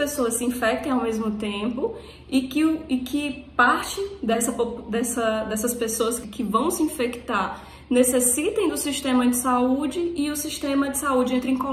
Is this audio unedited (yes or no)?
no